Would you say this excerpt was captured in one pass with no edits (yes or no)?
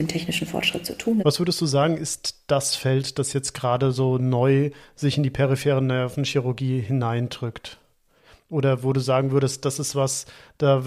no